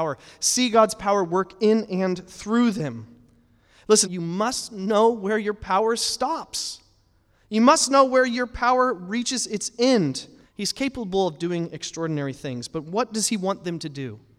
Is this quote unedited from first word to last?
no; 2 cuts; at 4.0 s, 10.4 s

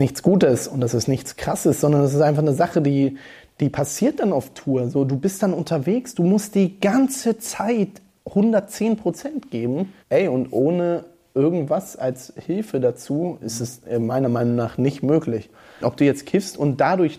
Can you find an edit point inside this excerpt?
yes; 1 cut; at 10.0 s

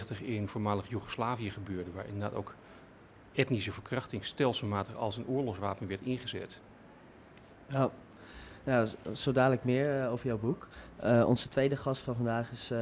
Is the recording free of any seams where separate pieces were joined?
yes; 0 cuts

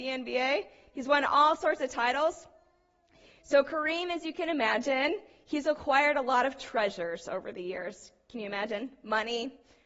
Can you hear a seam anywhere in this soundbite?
no; 0 cuts

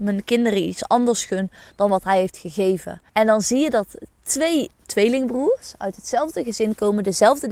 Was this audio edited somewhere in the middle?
yes; 2 cuts; at 3.1 s, 4.8 s

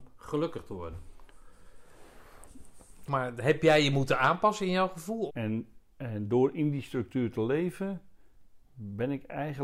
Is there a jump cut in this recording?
yes; 2 cuts; at 3.1 s, 5.3 s

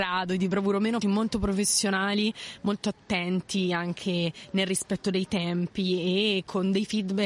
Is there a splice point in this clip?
yes; 1 cut; at 1.0 s

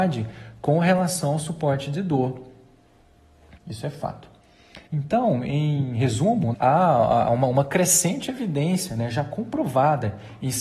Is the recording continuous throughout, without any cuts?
no; 3 cuts; at 3.6 s, 4.9 s, 6.5 s

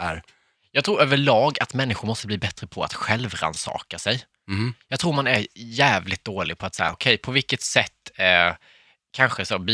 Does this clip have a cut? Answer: yes; 1 cut; at 6.9 s

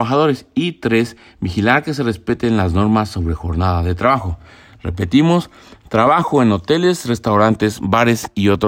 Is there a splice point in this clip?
no; 0 cuts

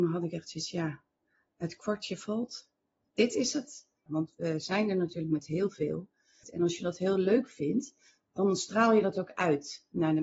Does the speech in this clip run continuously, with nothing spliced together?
no; 2 cuts; at 4.1 s, 6.4 s

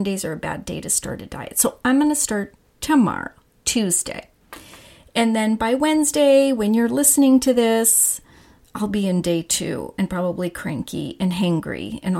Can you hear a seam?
no; 0 cuts

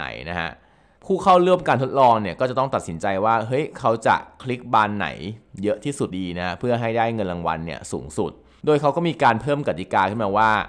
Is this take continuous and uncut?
no; 1 cut; at 6.1 s

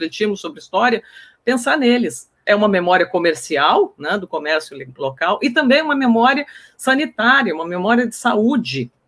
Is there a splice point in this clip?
yes; 1 cut; at 2.4 s

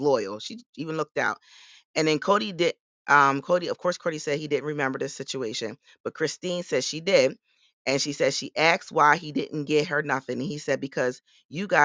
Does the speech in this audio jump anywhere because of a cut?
no; 0 cuts

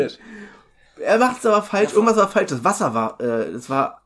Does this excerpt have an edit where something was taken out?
no; 0 cuts

